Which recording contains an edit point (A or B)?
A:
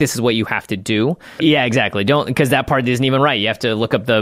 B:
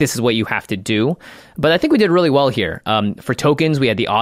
A